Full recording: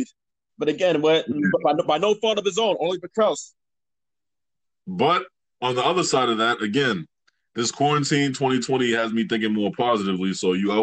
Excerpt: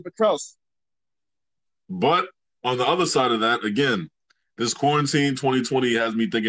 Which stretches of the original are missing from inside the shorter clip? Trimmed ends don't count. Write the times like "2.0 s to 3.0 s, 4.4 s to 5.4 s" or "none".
none